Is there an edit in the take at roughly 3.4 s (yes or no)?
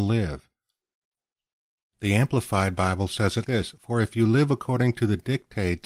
yes